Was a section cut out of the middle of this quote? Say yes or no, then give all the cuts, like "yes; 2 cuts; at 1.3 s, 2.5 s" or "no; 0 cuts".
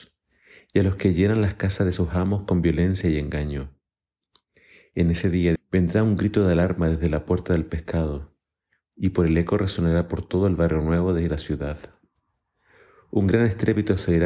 yes; 1 cut; at 5.6 s